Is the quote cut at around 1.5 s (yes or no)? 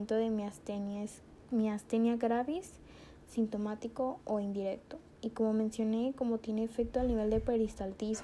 yes